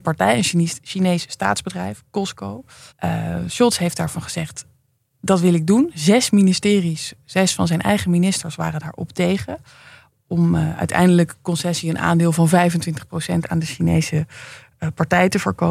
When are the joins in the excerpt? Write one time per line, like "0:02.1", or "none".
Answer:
0:02.9